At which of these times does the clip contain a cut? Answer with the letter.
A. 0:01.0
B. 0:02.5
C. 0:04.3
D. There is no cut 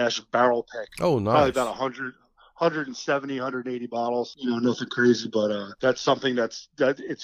D